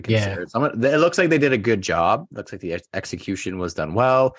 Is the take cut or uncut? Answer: uncut